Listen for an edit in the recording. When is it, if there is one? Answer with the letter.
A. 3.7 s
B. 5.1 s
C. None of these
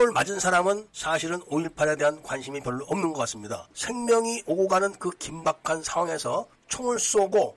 A